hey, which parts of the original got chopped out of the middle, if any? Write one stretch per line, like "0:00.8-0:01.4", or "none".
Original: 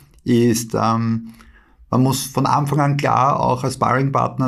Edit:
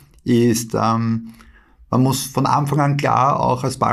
none